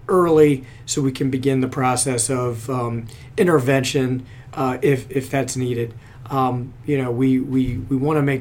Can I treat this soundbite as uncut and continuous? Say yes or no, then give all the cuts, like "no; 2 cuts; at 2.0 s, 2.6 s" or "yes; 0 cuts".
yes; 0 cuts